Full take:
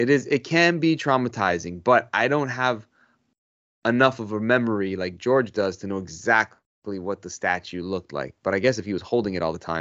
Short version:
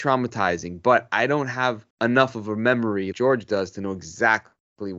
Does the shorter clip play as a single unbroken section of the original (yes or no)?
no